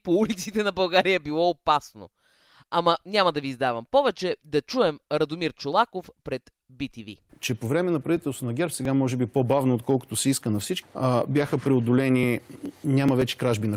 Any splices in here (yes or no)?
yes